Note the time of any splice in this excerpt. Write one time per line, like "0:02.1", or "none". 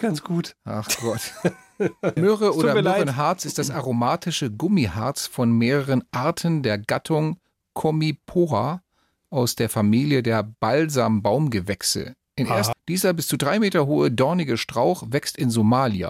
0:02.2
0:12.7